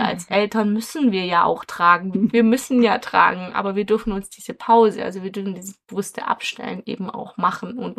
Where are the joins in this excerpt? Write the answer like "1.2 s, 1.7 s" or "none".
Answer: 2.1 s